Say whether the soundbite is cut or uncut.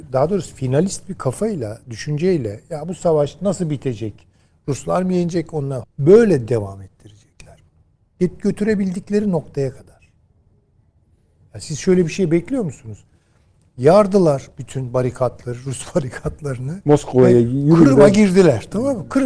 cut